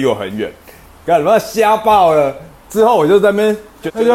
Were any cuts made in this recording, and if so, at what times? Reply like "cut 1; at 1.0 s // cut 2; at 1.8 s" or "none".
none